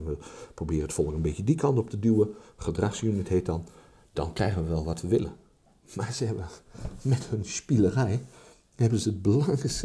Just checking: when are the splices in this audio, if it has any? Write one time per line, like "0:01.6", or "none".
none